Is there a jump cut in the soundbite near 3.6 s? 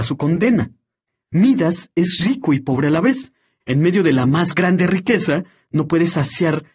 yes; 1 cut; at 3.6 s

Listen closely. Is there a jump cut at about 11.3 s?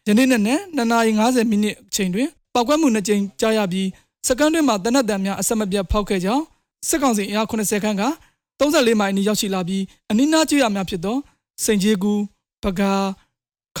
no; 0 cuts

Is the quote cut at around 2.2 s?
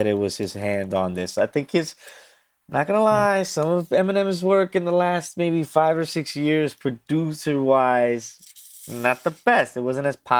no; 0 cuts

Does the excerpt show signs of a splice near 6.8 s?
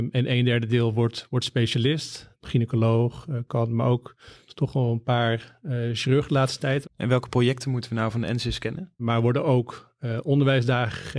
yes; 3 cuts; at 2.3 s, 6.8 s, 9.0 s

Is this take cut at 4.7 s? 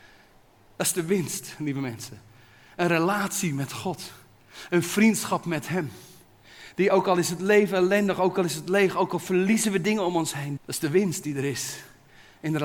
no; 1 cut; at 10.6 s

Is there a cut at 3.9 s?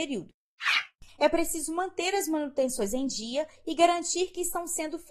no; 1 cut; at 1.1 s

